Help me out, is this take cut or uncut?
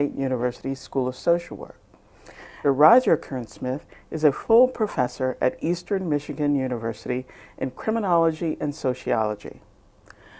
cut